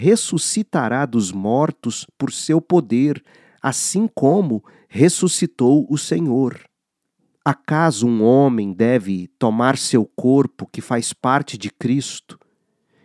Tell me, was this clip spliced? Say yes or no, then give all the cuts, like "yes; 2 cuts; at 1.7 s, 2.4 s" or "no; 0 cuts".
yes; 1 cut; at 7.4 s